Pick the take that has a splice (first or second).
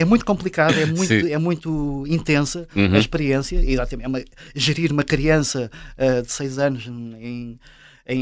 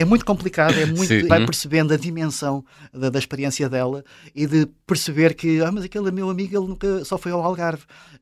second